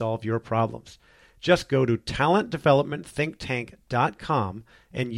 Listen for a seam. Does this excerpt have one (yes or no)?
yes